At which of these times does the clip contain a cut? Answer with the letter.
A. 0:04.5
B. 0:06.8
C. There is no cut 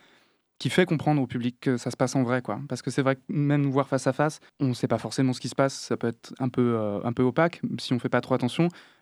A